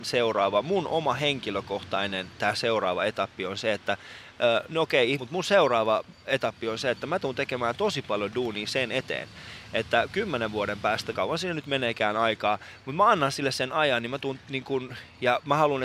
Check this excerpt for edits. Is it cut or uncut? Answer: cut